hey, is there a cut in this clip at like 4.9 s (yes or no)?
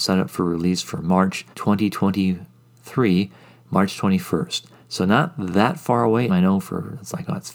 no